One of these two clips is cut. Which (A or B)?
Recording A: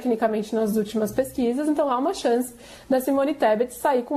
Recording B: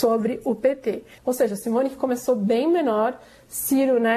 B